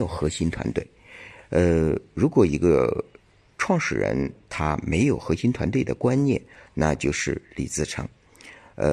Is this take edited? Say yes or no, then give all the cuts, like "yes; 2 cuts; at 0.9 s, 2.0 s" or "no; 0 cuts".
no; 0 cuts